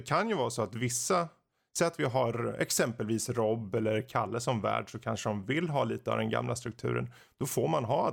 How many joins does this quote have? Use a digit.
0